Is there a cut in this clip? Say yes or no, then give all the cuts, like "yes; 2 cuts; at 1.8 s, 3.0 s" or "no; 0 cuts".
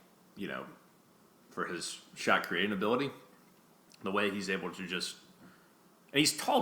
no; 0 cuts